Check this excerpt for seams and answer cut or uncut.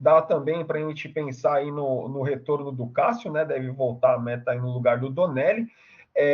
uncut